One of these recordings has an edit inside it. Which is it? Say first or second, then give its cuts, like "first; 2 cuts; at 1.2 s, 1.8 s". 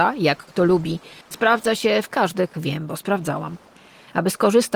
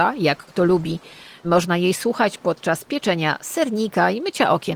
first; 2 cuts; at 1.2 s, 2.5 s